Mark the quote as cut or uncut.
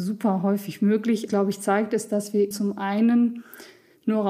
cut